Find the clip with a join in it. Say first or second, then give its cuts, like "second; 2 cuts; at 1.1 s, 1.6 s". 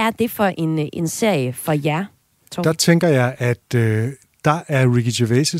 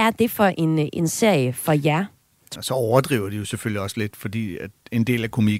second; 1 cut; at 2.6 s